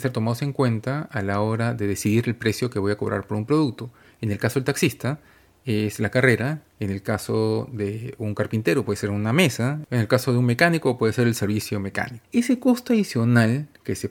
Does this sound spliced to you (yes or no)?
yes